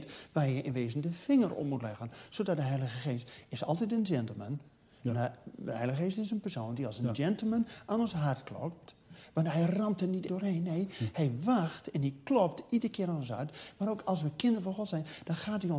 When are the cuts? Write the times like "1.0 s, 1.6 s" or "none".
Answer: 10.3 s